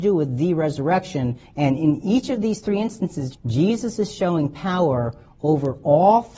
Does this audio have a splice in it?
yes; 2 cuts; at 1.4 s, 3.3 s

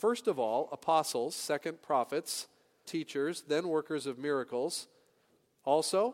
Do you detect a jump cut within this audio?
yes; 1 cut; at 2.8 s

